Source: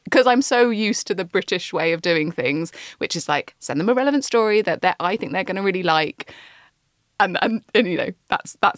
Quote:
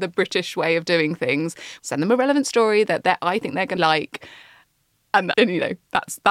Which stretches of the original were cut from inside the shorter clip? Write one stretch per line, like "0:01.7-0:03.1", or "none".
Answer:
0:03.0-0:03.6
0:05.5-0:05.8
0:07.4-0:07.7